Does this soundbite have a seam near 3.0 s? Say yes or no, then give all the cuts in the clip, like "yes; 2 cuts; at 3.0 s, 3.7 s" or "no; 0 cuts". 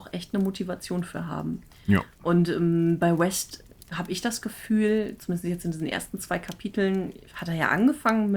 no; 0 cuts